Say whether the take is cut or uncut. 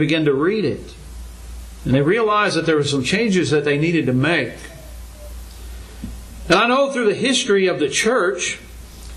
uncut